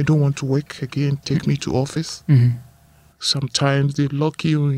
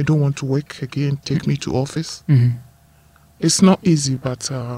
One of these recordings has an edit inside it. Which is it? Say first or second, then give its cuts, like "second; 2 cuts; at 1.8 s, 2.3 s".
first; 1 cut; at 3.1 s